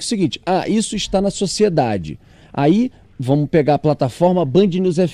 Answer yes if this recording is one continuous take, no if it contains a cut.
yes